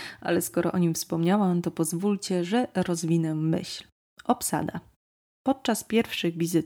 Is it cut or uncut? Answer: uncut